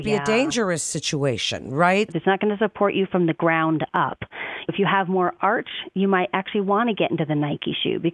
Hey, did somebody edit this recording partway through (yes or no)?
yes